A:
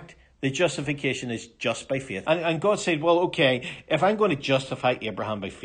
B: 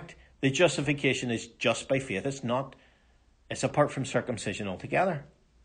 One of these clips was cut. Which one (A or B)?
A